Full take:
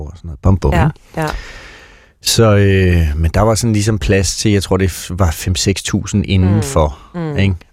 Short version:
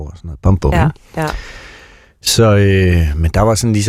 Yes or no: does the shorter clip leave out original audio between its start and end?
no